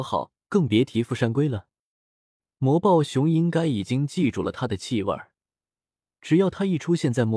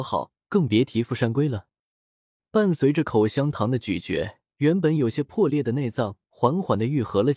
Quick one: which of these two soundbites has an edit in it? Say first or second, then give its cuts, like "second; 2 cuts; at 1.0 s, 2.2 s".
second; 2 cuts; at 2.5 s, 4.5 s